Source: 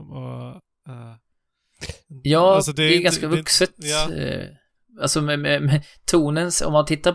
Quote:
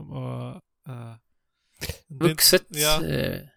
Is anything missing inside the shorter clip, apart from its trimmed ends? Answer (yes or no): yes